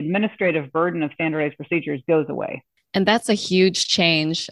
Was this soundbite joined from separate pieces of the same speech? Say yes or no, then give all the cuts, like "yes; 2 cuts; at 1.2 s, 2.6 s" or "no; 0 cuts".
no; 0 cuts